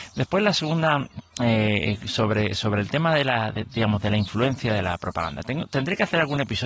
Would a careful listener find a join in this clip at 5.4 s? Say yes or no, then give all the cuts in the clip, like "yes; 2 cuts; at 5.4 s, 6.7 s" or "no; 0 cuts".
no; 1 cut; at 1.3 s